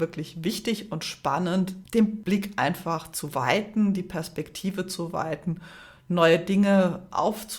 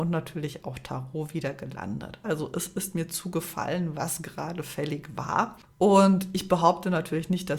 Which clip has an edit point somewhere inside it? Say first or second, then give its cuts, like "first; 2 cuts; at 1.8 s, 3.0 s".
second; 2 cuts; at 2.2 s, 5.6 s